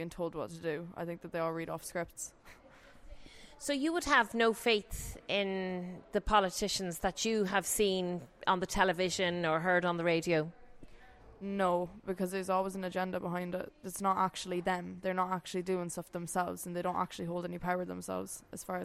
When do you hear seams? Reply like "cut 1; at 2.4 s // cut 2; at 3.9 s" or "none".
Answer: none